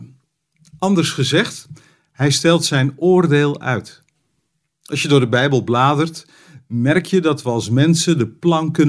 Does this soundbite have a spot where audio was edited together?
no; 0 cuts

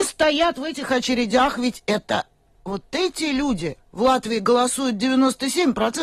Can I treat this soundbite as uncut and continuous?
yes; 0 cuts

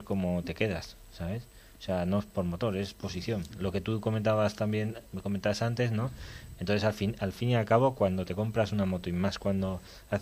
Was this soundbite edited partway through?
yes; 2 cuts; at 3.5 s, 6.6 s

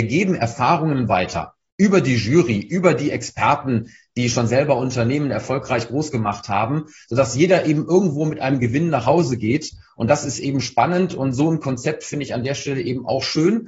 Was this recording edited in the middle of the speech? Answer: no; 0 cuts

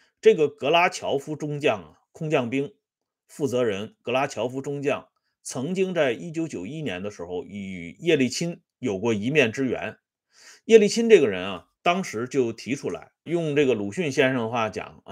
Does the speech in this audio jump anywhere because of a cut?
yes; 2 cuts; at 11.7 s, 13.3 s

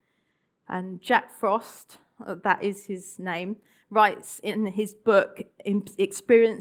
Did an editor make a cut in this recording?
no; 0 cuts

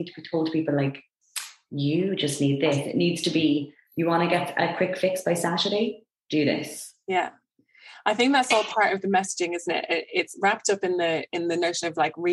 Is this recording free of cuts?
yes; 0 cuts

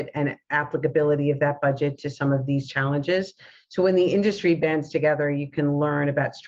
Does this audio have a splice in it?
no; 0 cuts

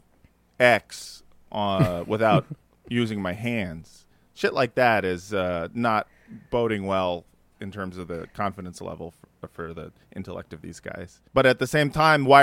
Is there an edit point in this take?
yes; 1 cut; at 11.3 s

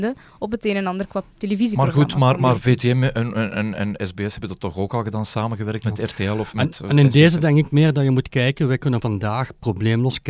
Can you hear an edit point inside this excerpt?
no; 0 cuts

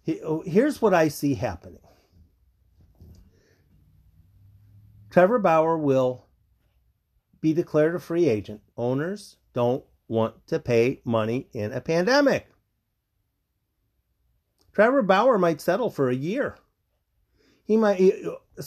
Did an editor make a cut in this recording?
yes; 1 cut; at 8.7 s

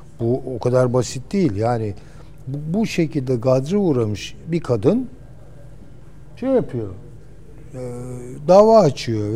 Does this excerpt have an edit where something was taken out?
no; 0 cuts

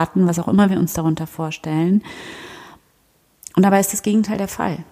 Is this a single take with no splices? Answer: yes; 0 cuts

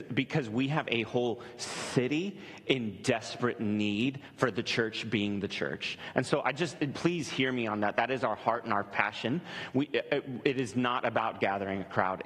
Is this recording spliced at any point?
no; 0 cuts

